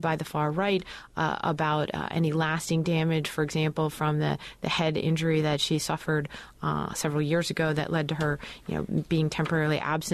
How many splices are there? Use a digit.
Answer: 0